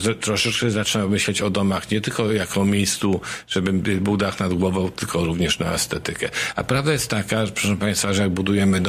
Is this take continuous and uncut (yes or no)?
yes